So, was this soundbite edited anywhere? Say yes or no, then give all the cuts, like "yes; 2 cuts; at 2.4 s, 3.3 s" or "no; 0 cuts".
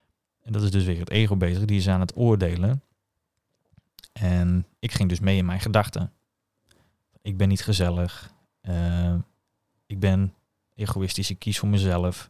no; 0 cuts